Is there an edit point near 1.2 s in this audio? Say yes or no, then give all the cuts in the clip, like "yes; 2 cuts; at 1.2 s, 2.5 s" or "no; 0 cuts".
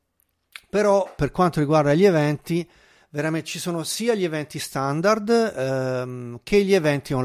yes; 1 cut; at 1.2 s